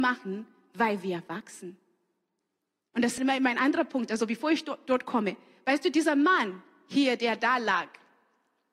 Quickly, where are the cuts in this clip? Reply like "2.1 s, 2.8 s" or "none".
3.2 s